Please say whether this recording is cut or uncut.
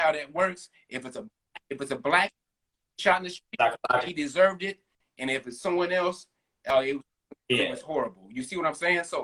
uncut